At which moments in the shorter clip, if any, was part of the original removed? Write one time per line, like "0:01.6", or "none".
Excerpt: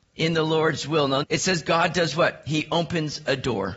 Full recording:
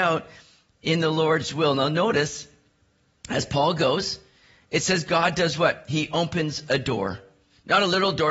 0:01.2